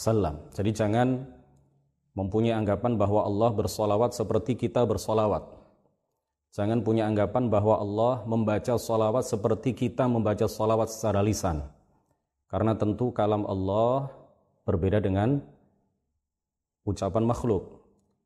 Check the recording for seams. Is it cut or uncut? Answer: uncut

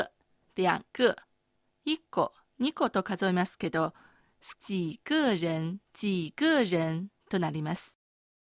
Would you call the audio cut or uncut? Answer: cut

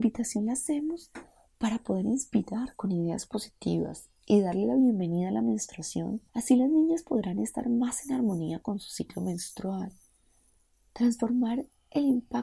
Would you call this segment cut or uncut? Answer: cut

